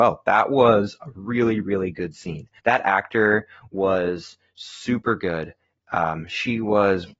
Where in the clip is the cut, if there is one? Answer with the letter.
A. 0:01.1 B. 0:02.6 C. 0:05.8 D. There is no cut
B